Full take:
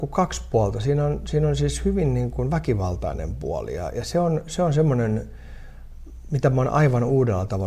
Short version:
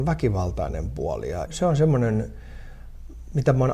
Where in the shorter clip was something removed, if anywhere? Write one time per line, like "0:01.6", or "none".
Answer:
0:01.5